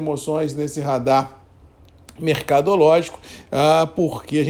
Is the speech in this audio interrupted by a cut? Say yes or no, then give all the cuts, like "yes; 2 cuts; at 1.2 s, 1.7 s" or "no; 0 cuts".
no; 0 cuts